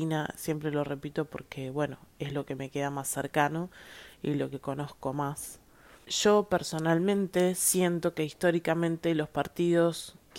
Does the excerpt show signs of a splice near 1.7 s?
no; 1 cut; at 6.0 s

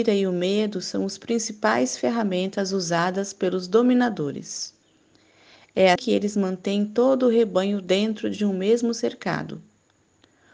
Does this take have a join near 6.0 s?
yes; 1 cut; at 6.0 s

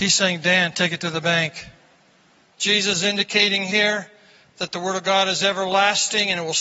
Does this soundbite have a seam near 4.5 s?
no; 1 cut; at 2.4 s

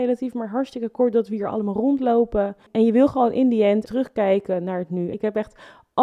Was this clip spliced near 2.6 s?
no; 2 cuts; at 3.8 s, 5.1 s

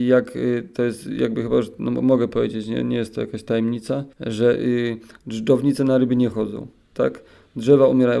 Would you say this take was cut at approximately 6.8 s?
no; 1 cut; at 4.1 s

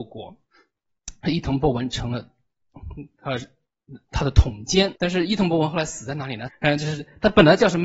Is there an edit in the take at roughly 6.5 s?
yes; 2 cuts; at 5.0 s, 6.5 s

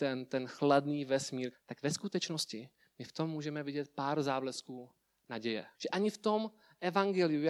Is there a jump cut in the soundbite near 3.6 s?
no; 2 cuts; at 1.5 s, 5.7 s

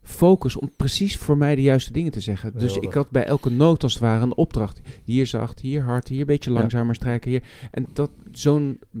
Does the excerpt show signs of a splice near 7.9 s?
yes; 1 cut; at 7.9 s

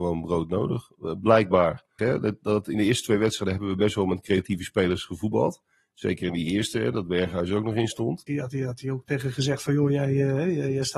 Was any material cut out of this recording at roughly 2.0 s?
yes; 2 cuts; at 2.0 s, 8.3 s

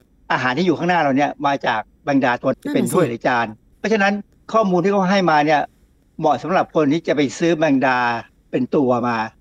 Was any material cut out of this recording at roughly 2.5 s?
yes; 1 cut; at 2.5 s

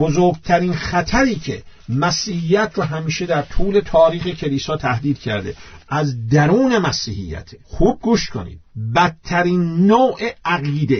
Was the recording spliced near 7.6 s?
yes; 1 cut; at 7.6 s

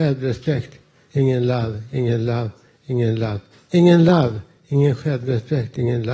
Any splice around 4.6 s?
no; 0 cuts

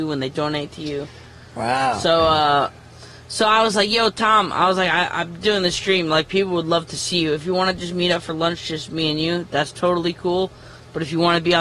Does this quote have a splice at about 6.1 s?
no; 0 cuts

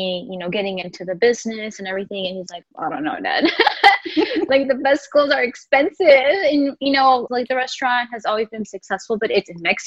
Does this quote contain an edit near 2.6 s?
yes; 3 cuts; at 2.6 s, 7.3 s, 8.6 s

